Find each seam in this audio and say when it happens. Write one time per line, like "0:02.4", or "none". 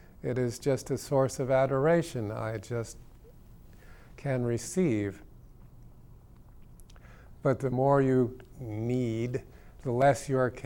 none